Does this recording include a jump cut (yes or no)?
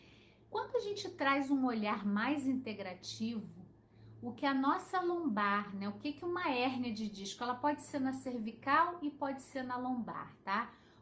no